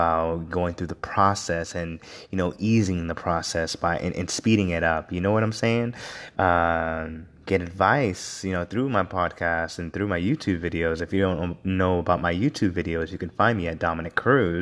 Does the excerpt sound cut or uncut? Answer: cut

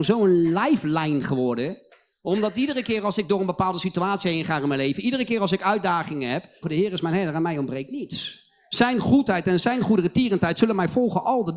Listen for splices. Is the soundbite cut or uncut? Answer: cut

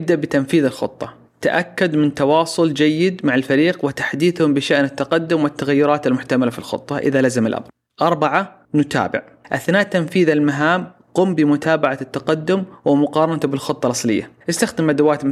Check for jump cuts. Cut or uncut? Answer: cut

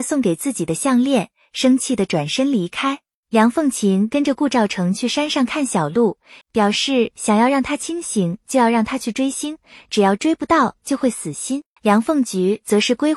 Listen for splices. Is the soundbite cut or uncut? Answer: cut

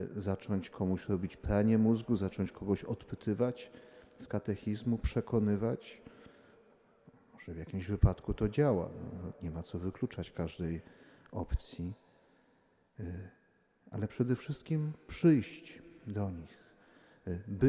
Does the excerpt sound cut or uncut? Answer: uncut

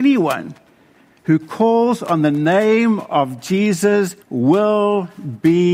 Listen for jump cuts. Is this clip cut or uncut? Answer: cut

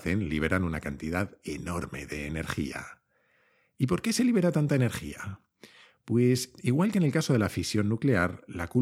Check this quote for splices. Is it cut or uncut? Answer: uncut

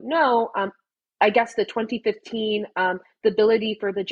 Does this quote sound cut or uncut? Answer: uncut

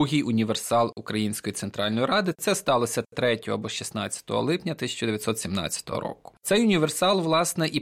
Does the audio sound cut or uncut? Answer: uncut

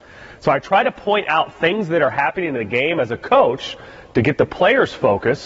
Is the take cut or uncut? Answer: uncut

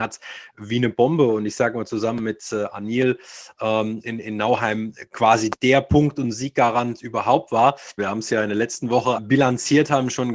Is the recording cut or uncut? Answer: cut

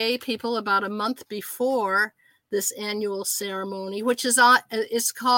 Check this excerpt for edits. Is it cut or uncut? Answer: uncut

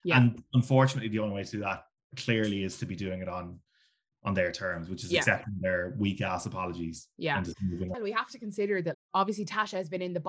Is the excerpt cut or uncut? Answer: cut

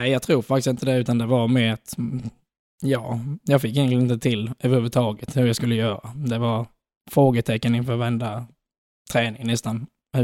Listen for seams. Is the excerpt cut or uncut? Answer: uncut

